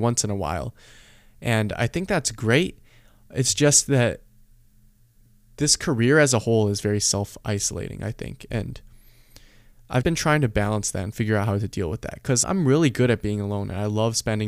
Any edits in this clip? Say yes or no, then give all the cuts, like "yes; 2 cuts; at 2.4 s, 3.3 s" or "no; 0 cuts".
yes; 2 cuts; at 10.0 s, 12.4 s